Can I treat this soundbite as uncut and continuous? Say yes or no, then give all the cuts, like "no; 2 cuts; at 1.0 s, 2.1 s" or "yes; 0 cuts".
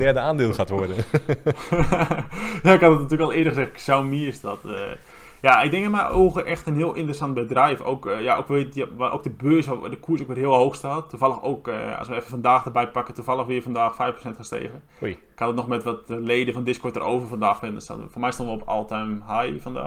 yes; 0 cuts